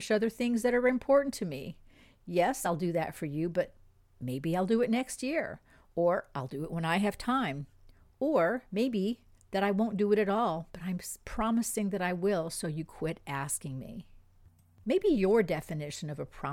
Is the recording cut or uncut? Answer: uncut